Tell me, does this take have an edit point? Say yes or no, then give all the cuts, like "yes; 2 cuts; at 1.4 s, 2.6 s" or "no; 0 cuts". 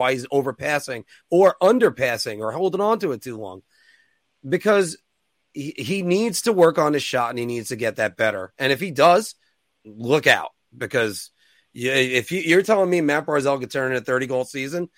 no; 0 cuts